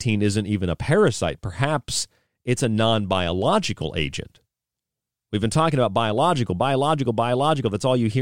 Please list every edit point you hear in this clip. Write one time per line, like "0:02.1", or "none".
none